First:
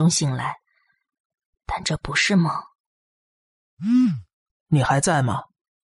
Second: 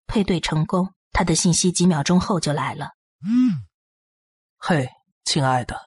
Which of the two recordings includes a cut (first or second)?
second